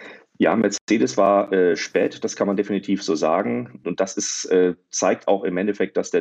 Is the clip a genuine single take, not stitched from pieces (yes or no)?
yes